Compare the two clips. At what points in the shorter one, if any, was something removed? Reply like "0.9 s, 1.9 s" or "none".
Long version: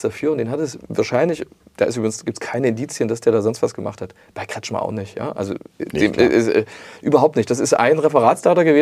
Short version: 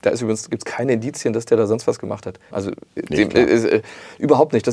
2.5 s